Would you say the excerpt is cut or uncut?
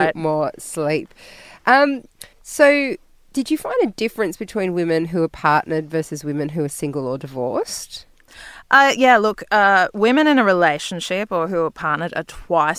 cut